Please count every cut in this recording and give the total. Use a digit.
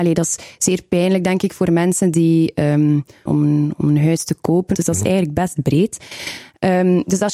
2